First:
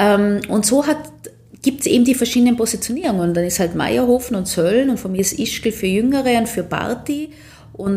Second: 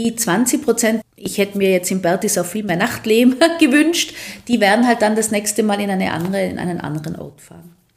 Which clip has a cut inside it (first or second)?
second